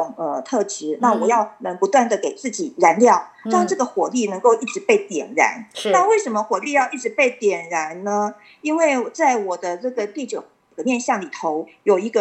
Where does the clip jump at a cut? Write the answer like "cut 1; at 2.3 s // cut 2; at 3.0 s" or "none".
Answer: none